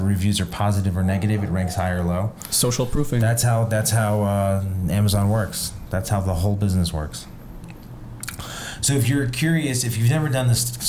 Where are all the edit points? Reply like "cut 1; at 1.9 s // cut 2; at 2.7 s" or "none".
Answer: none